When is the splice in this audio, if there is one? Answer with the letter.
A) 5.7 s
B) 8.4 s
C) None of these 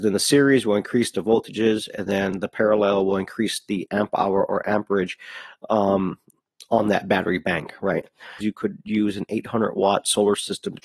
B